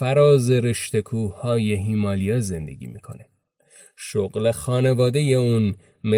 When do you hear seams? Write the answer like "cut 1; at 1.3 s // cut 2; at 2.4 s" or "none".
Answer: none

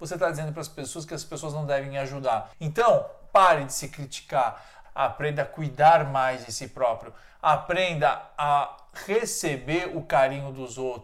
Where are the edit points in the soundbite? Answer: cut 1; at 4.8 s

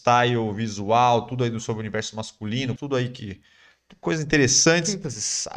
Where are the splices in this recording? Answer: cut 1; at 2.8 s

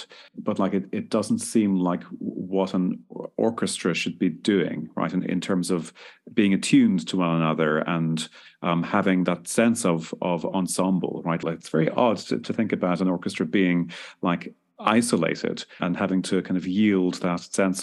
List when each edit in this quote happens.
cut 1; at 11.4 s // cut 2; at 15.8 s

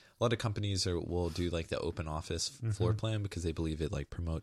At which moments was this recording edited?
none

